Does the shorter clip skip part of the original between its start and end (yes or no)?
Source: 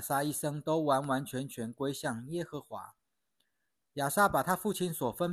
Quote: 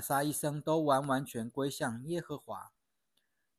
yes